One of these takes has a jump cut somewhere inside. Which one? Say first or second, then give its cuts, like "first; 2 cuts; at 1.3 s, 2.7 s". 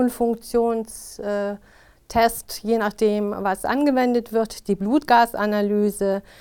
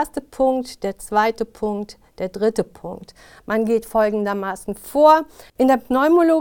second; 1 cut; at 5.5 s